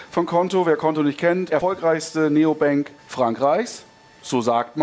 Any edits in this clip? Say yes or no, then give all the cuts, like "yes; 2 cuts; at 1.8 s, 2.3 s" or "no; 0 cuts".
yes; 2 cuts; at 1.5 s, 3.0 s